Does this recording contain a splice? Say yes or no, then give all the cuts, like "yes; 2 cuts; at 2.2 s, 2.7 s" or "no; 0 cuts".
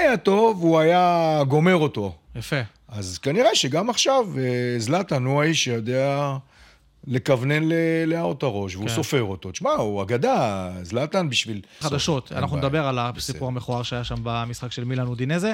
yes; 1 cut; at 11.8 s